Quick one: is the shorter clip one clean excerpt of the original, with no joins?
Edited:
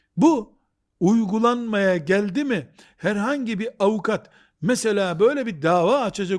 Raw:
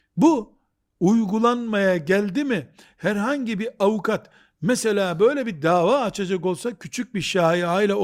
yes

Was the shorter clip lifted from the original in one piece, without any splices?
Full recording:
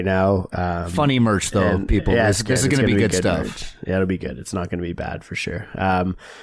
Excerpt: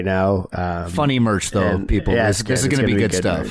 yes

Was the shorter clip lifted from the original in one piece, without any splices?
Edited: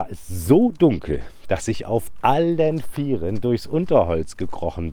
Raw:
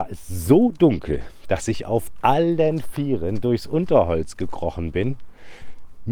yes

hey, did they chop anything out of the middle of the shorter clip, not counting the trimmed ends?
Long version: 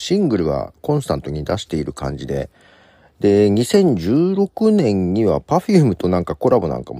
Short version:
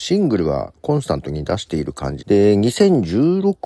yes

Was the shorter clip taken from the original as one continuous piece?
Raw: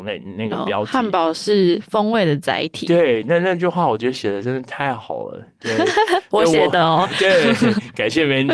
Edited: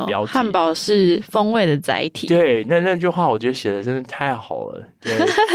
yes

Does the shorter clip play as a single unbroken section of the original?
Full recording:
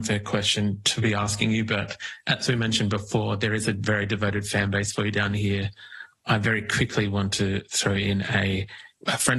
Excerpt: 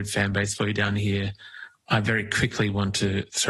yes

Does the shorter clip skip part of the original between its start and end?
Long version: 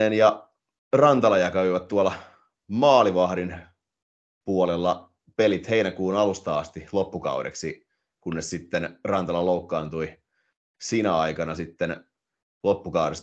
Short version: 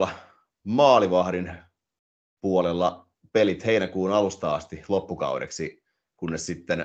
no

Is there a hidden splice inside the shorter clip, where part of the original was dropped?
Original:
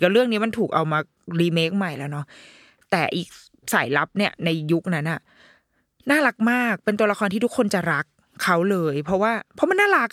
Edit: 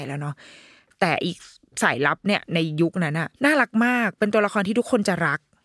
yes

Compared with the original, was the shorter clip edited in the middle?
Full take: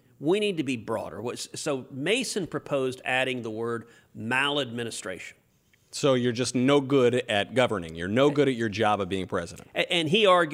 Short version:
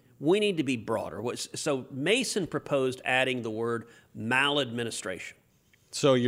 no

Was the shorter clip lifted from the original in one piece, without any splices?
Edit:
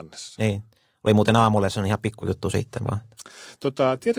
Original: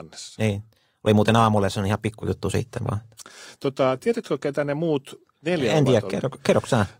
yes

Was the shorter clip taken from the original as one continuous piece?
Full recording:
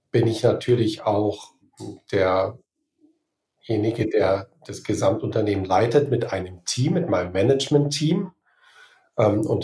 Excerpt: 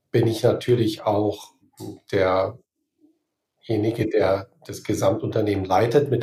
yes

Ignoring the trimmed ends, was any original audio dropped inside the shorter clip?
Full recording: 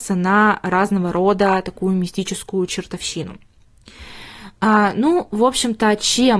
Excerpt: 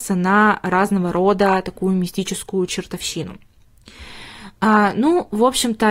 no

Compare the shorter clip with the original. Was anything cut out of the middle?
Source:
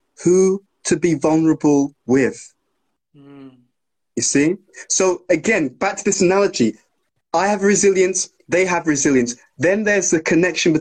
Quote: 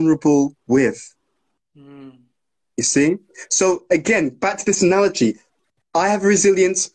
no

